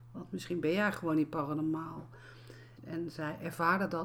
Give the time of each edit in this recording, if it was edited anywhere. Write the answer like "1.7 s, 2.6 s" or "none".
2.8 s